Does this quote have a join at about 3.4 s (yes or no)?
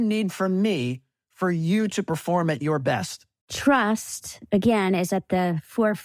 yes